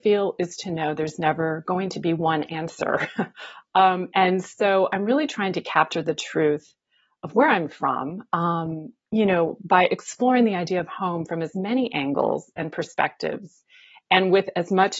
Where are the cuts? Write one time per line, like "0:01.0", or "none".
none